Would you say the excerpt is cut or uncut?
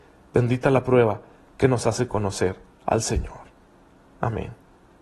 uncut